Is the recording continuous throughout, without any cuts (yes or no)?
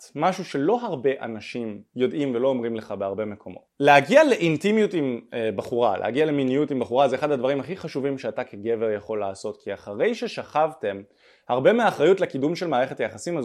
yes